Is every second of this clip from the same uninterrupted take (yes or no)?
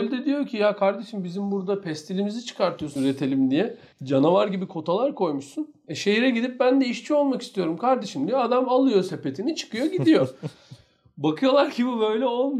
no